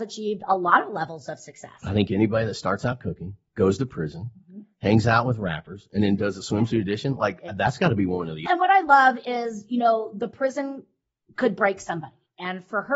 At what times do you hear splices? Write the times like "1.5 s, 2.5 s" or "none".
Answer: 8.5 s